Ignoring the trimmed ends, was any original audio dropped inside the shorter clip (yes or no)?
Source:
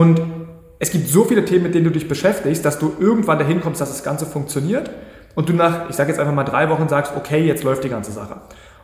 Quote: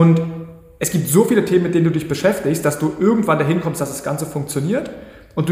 no